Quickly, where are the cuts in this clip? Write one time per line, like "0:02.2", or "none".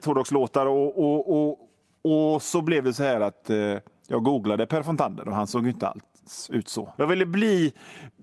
0:06.9